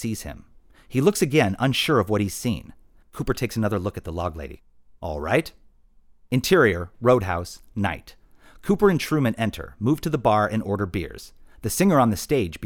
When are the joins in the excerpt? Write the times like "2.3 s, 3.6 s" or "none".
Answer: 3.0 s